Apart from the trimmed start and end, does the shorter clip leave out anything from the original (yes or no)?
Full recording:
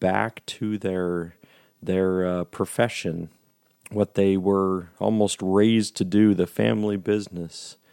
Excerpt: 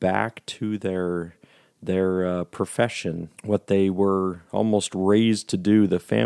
yes